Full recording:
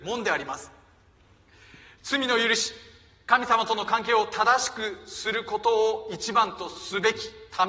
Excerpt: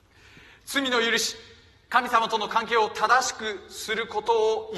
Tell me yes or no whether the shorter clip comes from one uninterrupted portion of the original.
yes